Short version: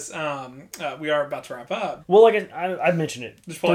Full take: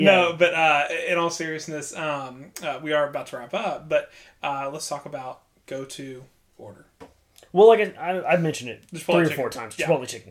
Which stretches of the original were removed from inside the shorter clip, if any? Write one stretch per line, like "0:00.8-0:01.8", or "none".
0:03.8-0:07.5